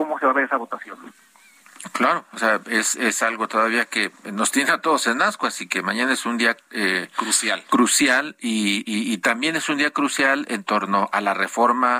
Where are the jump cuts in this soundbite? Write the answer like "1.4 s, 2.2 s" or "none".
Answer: none